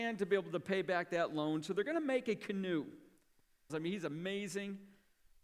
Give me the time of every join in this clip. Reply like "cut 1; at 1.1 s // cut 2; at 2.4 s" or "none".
cut 1; at 3.7 s